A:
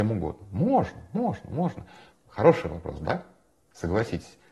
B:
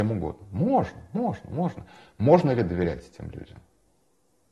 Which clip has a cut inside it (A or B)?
A